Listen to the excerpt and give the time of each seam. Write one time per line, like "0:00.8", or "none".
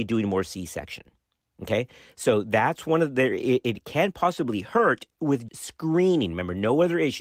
0:05.5